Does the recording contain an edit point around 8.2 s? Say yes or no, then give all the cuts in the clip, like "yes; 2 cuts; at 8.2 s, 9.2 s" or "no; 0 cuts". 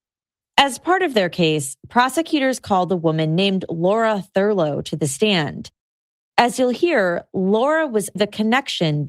yes; 1 cut; at 8.2 s